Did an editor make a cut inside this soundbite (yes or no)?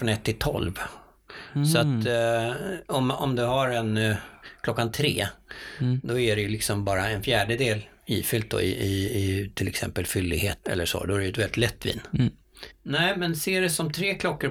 yes